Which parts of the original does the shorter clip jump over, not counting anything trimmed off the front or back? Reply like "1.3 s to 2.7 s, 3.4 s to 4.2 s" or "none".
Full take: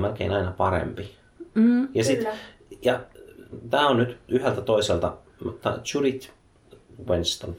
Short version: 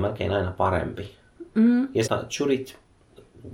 2.0 s to 5.6 s

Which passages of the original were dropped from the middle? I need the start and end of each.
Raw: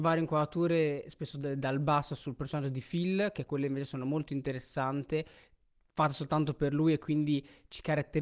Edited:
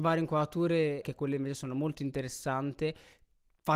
1.0 s to 3.3 s

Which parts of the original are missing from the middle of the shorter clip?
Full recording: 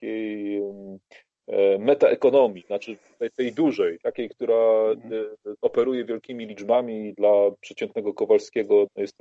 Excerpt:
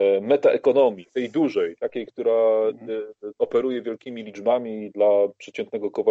2.7 s to 3.3 s

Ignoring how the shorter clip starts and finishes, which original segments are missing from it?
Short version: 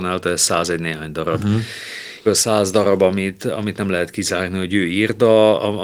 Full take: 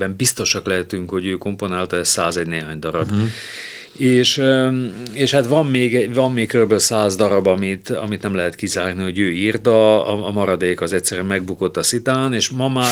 3.9 s to 6.7 s

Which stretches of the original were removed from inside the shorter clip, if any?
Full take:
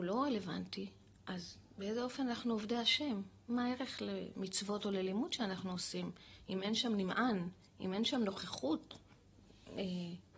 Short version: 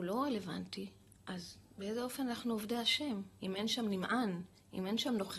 3.4 s to 6.5 s

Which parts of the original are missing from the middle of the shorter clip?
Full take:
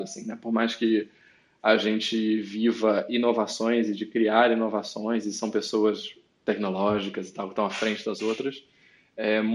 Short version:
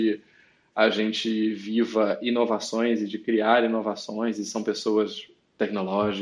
none

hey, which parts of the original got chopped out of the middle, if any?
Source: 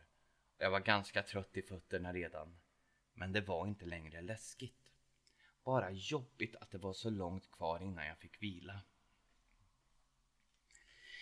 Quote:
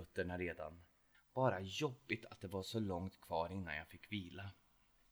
2.9 s to 5.4 s

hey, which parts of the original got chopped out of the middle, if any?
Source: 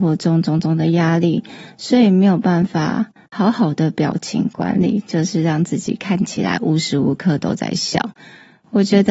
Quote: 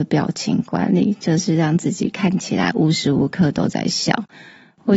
none

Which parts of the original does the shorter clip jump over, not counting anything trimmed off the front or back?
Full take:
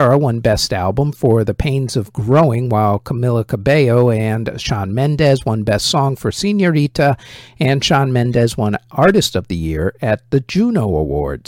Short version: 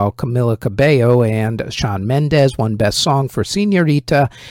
none

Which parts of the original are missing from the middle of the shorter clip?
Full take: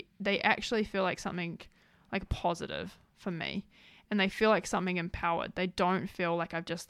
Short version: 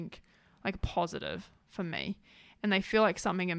none

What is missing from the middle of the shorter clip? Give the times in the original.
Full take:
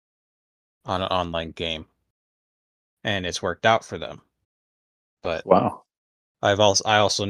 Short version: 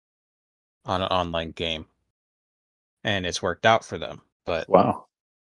4.3 s to 5.1 s

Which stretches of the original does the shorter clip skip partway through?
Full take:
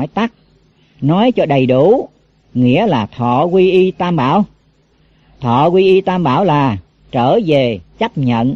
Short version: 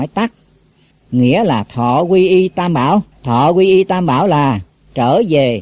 0.9 s to 2.3 s, 4.5 s to 5.3 s

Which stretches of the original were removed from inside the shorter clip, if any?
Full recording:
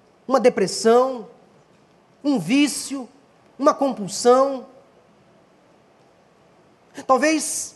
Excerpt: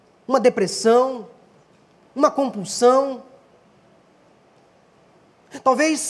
2.0 s to 3.4 s

